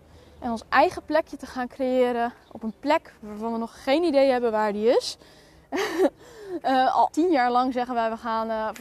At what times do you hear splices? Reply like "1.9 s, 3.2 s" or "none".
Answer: 7.1 s